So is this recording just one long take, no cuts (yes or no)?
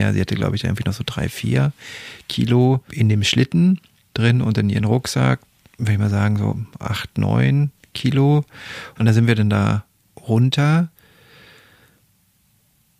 no